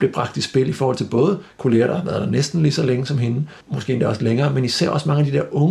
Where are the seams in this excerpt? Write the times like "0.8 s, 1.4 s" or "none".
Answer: 3.6 s